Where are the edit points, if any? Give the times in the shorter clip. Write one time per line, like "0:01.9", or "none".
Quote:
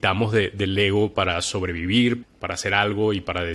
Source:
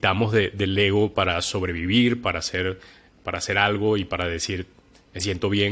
0:02.2